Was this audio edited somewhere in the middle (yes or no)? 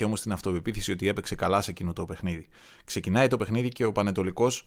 no